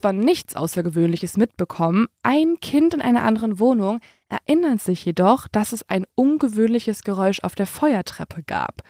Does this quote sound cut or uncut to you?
uncut